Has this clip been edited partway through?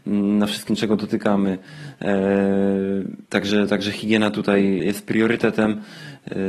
yes; 2 cuts; at 3.3 s, 4.8 s

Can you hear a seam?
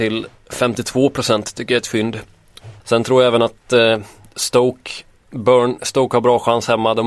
yes; 1 cut; at 2.8 s

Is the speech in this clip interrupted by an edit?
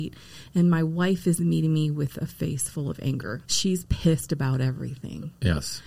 yes; 1 cut; at 3.4 s

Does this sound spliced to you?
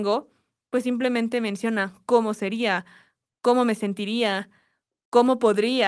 no; 0 cuts

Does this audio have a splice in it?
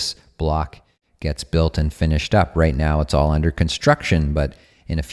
no; 0 cuts

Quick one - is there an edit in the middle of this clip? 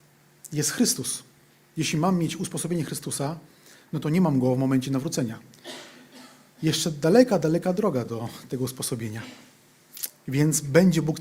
no; 0 cuts

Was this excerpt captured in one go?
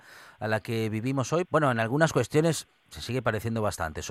no; 1 cut; at 1.4 s

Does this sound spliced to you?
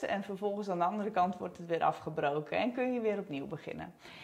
no; 0 cuts

